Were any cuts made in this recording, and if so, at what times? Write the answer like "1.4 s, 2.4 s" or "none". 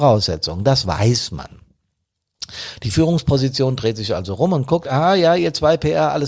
none